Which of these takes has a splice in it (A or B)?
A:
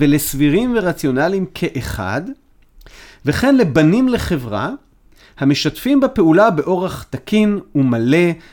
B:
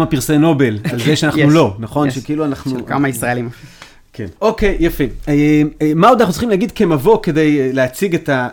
B